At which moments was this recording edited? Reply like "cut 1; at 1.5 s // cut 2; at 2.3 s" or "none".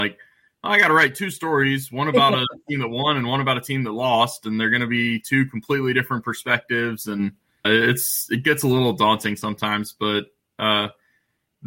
cut 1; at 7.6 s